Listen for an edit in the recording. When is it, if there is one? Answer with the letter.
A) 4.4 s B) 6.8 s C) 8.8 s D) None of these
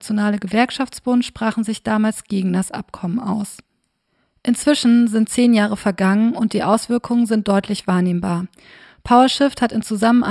D